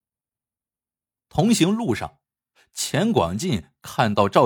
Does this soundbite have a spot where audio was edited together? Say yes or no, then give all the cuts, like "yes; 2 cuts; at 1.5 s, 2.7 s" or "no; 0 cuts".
no; 0 cuts